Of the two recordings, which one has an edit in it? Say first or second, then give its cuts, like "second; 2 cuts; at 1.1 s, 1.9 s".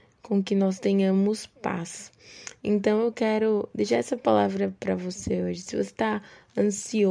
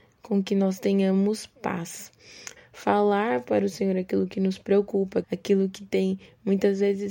second; 2 cuts; at 2.6 s, 5.2 s